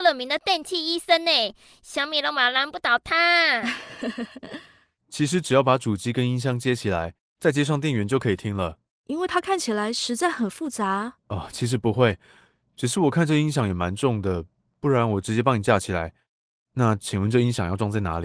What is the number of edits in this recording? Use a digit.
1